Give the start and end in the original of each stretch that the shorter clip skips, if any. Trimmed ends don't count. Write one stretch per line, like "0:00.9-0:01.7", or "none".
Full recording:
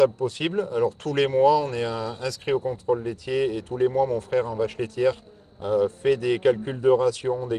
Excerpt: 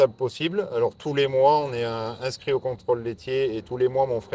none